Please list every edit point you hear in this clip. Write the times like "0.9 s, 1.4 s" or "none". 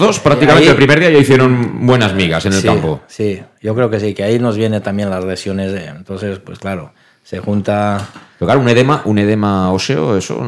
none